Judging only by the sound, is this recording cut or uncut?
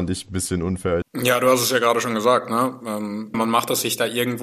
cut